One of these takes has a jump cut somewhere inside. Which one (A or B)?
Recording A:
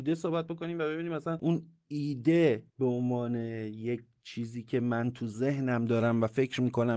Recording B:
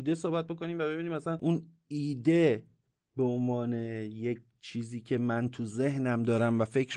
A